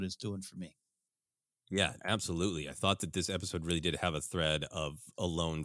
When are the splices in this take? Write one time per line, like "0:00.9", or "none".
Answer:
0:02.0